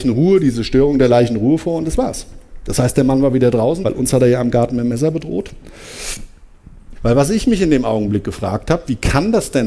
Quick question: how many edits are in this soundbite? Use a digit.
2